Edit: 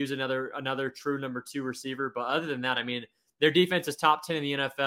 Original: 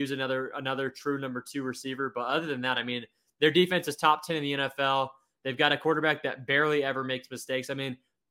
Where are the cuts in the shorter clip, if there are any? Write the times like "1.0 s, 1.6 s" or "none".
none

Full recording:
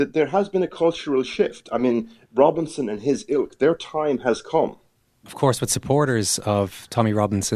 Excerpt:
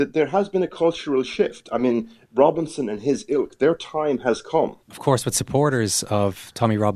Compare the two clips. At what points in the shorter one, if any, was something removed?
4.8 s

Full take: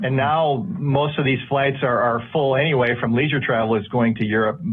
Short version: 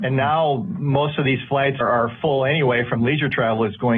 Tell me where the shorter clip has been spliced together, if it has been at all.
1.8 s

